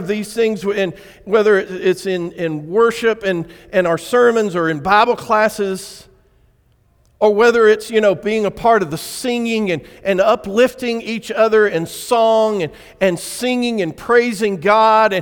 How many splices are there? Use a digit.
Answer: 0